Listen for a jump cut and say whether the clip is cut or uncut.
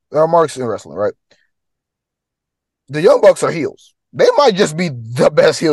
uncut